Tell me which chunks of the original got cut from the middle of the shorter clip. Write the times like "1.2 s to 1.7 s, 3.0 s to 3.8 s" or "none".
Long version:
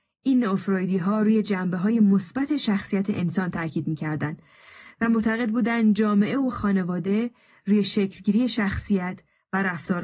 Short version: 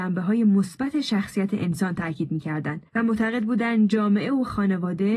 4.4 s to 4.9 s